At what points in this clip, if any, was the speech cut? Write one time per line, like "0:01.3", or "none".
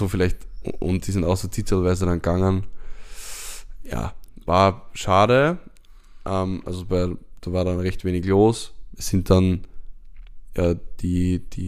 0:08.9